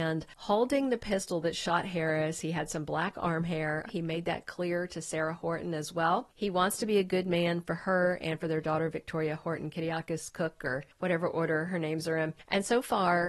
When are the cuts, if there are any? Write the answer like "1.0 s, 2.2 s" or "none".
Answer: 3.9 s